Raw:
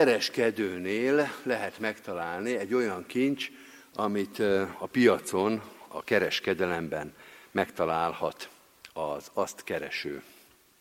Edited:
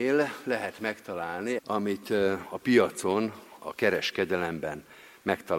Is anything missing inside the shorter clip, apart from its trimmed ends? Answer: yes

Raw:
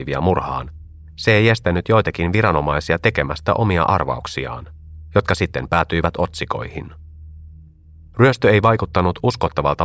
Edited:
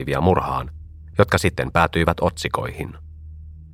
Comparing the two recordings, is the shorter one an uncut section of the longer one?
no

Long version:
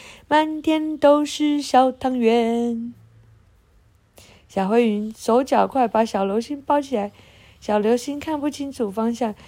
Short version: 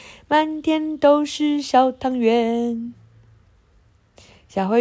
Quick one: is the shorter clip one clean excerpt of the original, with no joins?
yes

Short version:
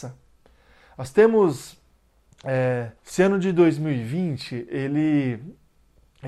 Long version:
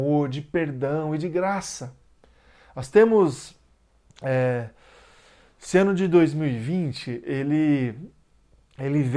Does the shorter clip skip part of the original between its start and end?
yes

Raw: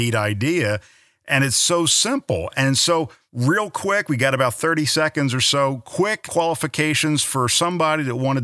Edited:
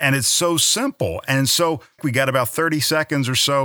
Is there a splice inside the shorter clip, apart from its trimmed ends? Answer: yes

